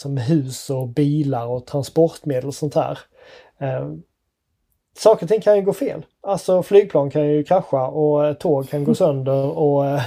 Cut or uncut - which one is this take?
uncut